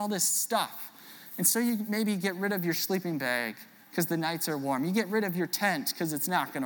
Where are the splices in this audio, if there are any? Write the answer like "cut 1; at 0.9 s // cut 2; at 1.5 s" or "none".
none